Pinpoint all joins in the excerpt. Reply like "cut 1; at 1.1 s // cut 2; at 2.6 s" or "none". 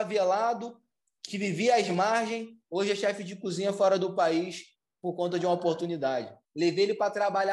cut 1; at 1.3 s // cut 2; at 6.5 s